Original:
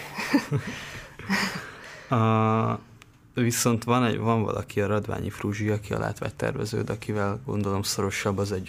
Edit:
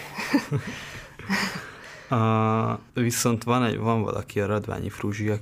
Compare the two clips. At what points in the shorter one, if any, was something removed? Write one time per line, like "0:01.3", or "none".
0:02.9

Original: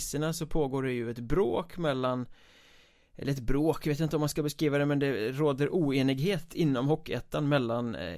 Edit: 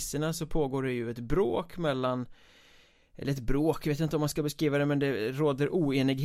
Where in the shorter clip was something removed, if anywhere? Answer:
none

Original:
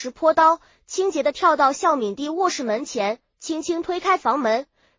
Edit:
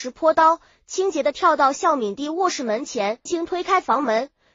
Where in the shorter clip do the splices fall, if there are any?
0:03.3

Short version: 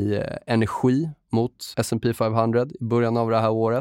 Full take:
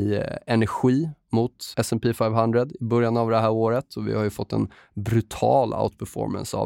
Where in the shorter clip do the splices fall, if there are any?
none

